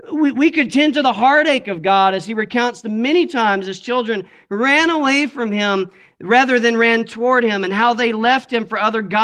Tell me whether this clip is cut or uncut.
uncut